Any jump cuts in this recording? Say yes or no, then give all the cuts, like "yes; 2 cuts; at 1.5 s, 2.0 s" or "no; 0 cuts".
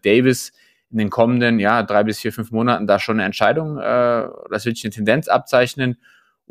no; 0 cuts